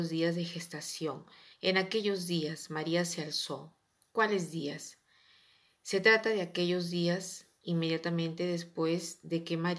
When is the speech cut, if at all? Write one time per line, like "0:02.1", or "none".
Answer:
0:01.5